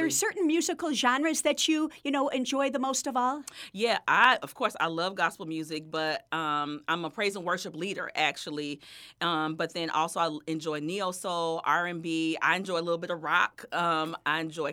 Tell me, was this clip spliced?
no; 0 cuts

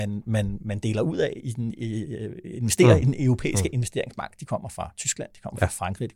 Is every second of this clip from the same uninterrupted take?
yes; 0 cuts

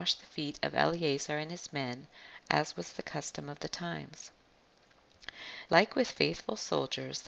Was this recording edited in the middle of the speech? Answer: yes; 1 cut; at 5.7 s

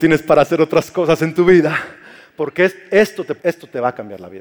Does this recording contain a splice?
yes; 1 cut; at 3.4 s

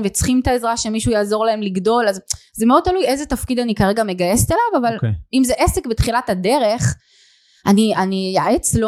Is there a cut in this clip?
no; 0 cuts

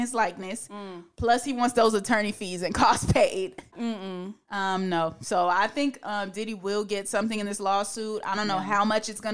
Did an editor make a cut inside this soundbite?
yes; 1 cut; at 3.7 s

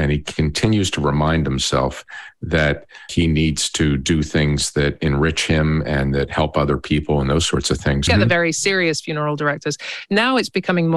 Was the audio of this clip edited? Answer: yes; 1 cut; at 8.1 s

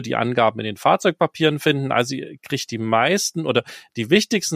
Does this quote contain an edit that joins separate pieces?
no; 0 cuts

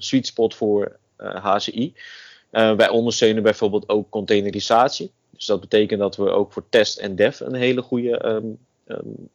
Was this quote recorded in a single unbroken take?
yes; 0 cuts

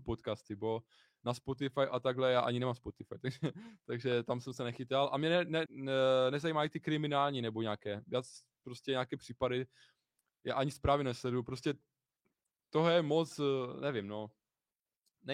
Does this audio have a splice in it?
yes; 1 cut; at 5.7 s

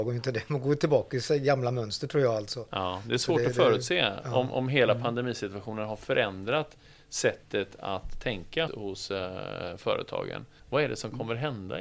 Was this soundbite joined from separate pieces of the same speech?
yes; 2 cuts; at 8.7 s, 10.6 s

